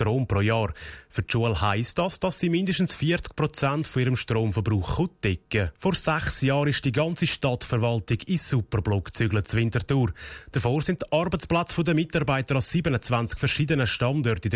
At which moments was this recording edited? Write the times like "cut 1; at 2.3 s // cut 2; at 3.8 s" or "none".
cut 1; at 5.8 s